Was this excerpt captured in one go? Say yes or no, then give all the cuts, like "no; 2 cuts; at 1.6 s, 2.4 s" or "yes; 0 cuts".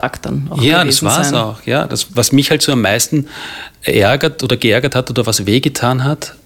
yes; 0 cuts